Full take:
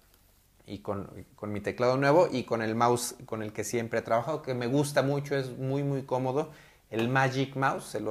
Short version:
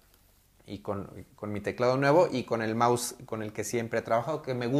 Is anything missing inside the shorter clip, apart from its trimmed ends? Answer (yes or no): no